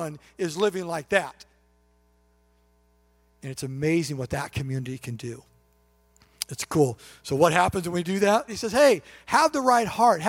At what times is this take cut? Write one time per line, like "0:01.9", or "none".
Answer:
0:08.5